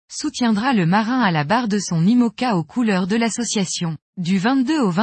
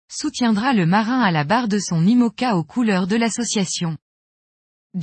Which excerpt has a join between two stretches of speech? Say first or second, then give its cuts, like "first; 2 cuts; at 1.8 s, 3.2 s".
first; 1 cut; at 4.1 s